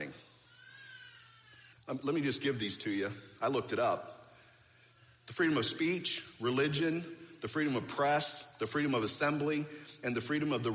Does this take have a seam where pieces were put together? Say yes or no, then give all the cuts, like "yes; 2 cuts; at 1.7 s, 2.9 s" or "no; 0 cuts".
yes; 1 cut; at 1.7 s